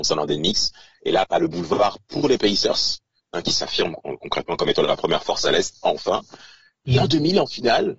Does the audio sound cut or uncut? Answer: uncut